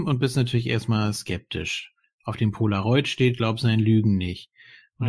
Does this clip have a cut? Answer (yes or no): no